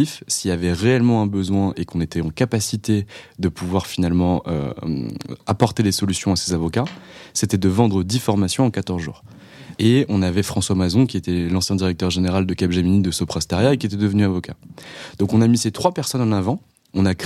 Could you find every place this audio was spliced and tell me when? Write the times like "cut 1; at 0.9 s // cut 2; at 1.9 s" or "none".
cut 1; at 9.7 s